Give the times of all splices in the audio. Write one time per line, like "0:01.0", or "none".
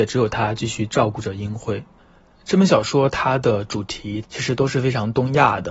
0:04.2